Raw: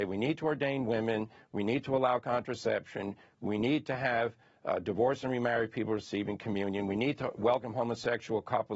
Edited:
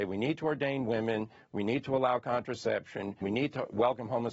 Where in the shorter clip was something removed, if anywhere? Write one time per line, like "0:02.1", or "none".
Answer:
0:03.2